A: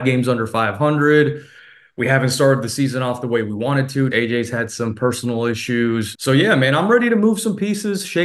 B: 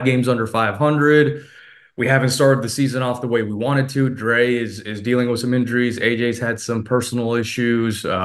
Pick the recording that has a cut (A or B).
A